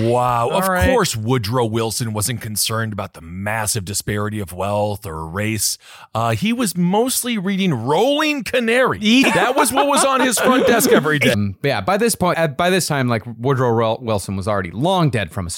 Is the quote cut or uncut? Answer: cut